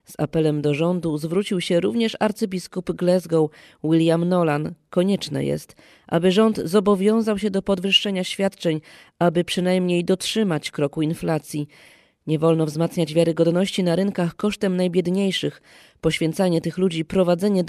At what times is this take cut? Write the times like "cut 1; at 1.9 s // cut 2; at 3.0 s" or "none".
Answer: none

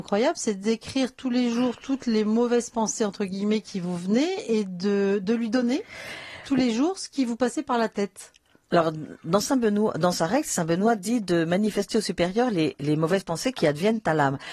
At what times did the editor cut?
none

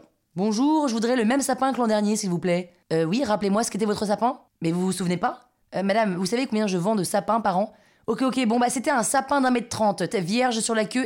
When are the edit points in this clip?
cut 1; at 10.1 s

